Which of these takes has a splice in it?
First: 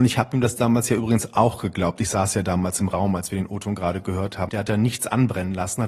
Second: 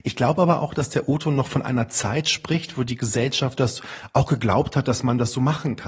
first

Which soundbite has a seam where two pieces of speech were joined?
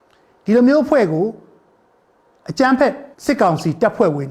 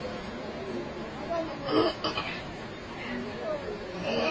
first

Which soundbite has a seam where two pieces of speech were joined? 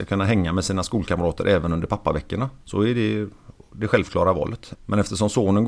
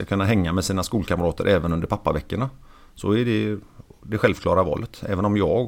first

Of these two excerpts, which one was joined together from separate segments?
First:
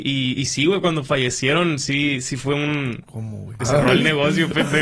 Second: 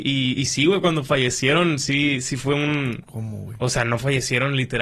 first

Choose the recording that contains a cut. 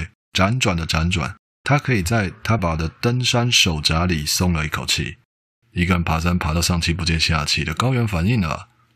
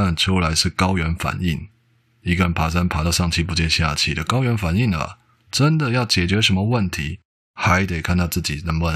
first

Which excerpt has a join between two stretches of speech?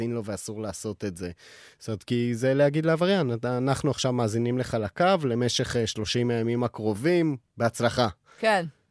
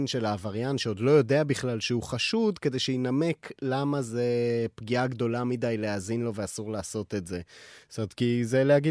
first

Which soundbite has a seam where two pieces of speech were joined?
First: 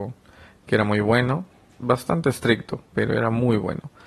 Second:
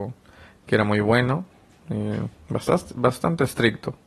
first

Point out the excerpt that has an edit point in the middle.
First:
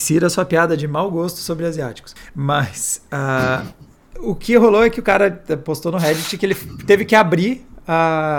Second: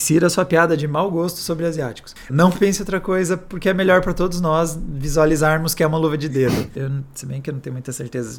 second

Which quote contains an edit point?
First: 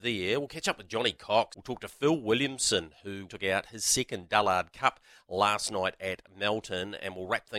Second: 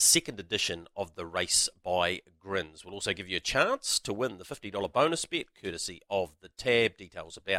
first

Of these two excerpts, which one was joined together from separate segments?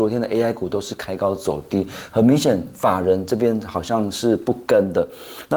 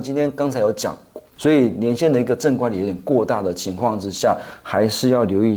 second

